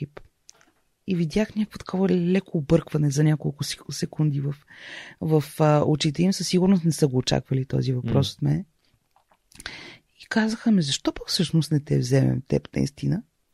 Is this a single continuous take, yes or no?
yes